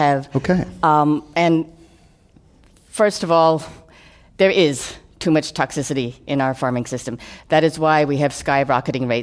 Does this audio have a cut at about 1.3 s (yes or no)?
no